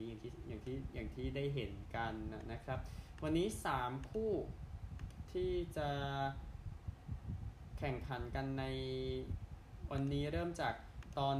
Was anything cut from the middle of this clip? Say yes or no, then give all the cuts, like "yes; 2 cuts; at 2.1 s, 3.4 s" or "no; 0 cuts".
no; 0 cuts